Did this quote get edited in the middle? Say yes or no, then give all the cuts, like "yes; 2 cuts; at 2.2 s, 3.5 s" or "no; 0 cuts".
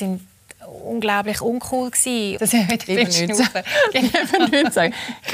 yes; 1 cut; at 2.4 s